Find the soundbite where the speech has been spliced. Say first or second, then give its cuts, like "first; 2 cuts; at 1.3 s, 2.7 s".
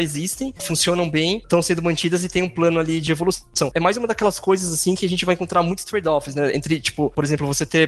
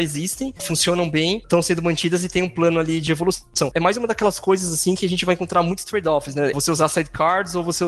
second; 1 cut; at 6.5 s